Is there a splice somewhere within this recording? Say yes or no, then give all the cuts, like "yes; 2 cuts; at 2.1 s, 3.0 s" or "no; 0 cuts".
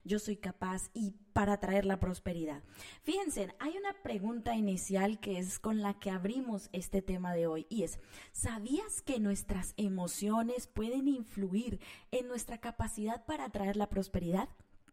no; 0 cuts